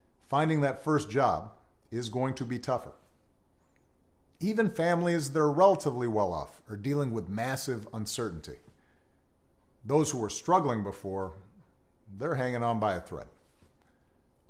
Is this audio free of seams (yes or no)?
yes